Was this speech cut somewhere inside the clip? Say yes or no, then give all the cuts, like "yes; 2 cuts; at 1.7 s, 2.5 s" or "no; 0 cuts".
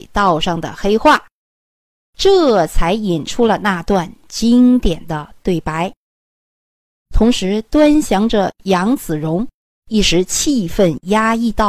yes; 2 cuts; at 7.0 s, 9.7 s